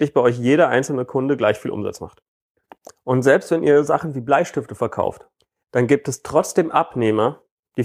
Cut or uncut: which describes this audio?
uncut